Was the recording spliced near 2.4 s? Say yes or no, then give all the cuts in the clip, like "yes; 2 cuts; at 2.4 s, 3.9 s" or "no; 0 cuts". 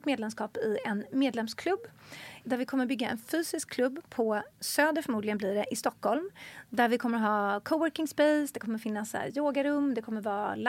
yes; 2 cuts; at 2.4 s, 4.5 s